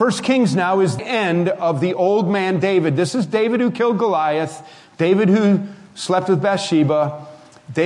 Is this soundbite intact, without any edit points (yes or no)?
no